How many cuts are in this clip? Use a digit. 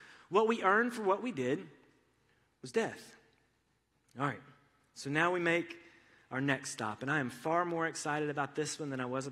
0